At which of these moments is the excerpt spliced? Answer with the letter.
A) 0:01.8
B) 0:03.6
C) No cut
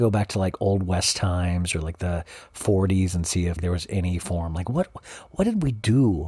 B